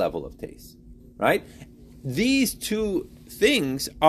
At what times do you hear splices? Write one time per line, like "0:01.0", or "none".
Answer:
none